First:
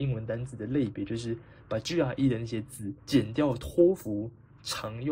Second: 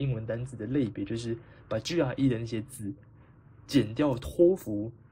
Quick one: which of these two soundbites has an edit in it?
first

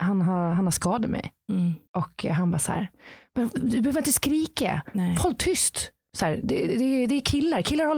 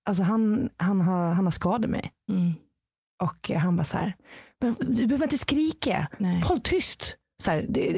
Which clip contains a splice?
first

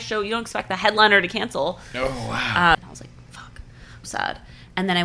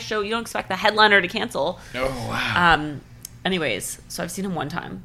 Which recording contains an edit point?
first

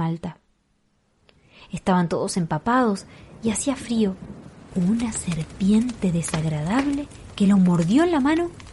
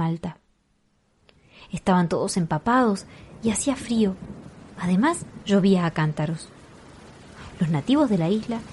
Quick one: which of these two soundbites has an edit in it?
first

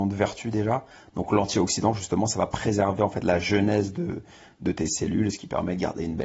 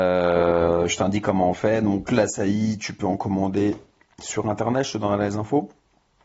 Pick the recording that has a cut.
first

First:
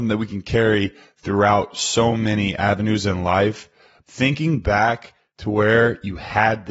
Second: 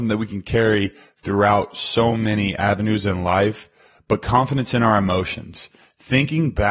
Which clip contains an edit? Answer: first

